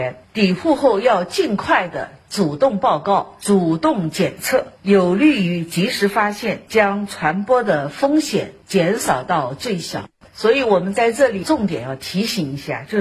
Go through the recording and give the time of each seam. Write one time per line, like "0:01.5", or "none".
0:10.2